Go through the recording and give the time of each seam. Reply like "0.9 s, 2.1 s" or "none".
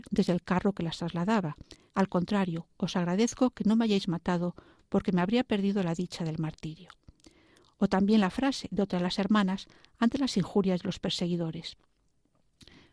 1.9 s

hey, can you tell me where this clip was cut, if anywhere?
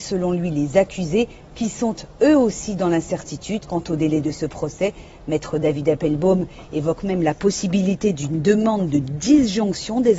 none

